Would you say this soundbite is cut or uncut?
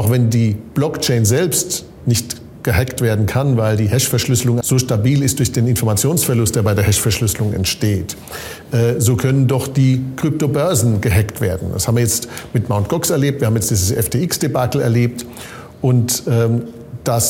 cut